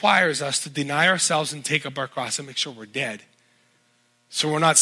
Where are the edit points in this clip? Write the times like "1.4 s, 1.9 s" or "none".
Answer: none